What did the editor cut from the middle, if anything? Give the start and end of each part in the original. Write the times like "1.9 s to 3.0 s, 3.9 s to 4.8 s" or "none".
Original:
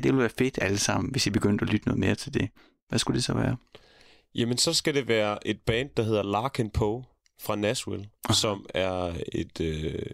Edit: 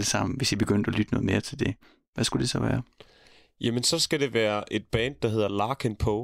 none

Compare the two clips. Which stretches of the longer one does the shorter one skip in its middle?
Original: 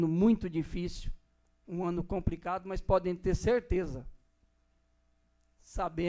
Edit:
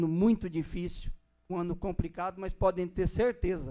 1.5 s to 1.8 s

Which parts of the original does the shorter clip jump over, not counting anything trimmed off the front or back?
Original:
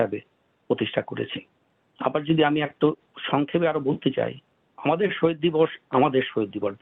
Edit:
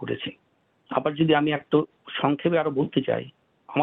none

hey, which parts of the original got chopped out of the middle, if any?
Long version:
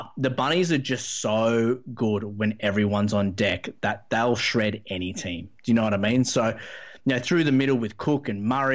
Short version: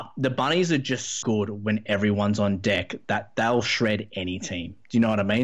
1.2 s to 2.0 s

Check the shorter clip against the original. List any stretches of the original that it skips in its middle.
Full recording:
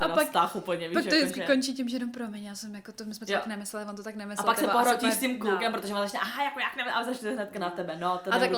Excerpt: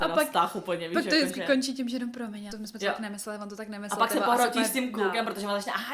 2.5 s to 3.0 s

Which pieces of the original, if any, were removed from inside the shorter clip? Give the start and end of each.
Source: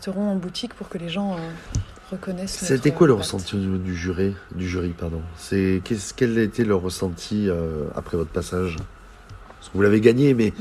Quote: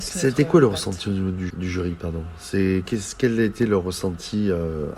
4.0 s to 4.5 s

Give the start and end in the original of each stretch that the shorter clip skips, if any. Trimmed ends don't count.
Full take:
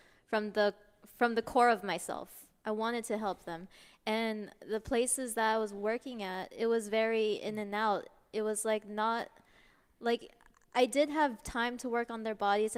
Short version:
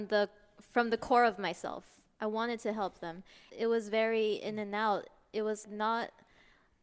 3.9 s to 6.5 s, 8.6 s to 8.8 s

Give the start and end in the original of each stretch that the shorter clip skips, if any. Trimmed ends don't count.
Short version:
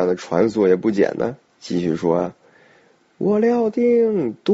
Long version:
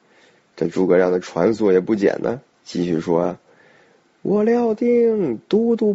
none

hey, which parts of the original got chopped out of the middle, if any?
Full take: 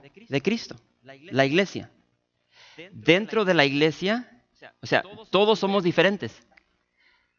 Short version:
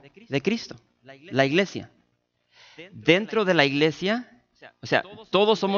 none

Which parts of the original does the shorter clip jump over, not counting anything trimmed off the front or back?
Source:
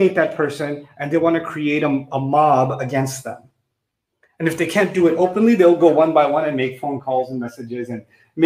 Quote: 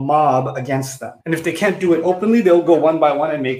3.4 s to 4.3 s

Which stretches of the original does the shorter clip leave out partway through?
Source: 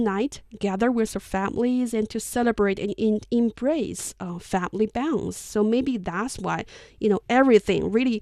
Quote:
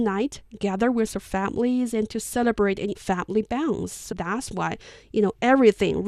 2.9 s to 4.4 s, 5.6 s to 6.0 s

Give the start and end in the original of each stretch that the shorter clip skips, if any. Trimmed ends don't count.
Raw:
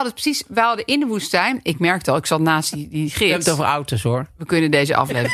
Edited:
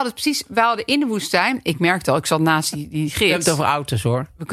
none

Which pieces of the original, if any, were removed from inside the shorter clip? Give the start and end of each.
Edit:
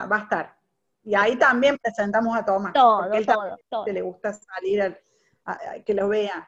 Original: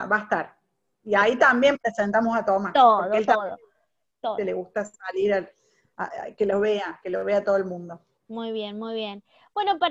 3.6 s to 4.1 s

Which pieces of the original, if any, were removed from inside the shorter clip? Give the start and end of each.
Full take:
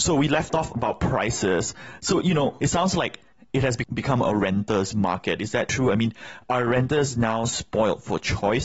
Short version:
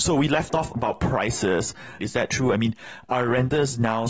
2.0 s to 5.4 s

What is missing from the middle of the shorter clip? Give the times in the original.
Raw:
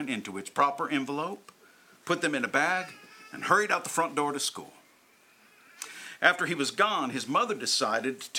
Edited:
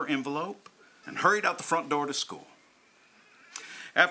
1.9 s to 3.3 s

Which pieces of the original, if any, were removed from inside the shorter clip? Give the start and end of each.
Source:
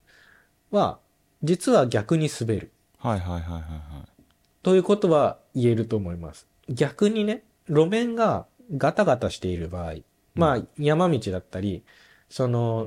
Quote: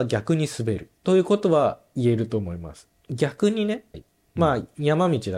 2.8 s to 4.6 s, 7.5 s to 9.9 s

